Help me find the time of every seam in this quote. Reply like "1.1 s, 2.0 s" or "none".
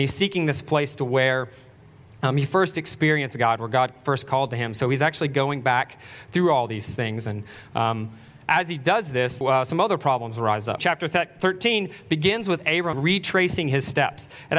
9.4 s, 10.8 s, 12.9 s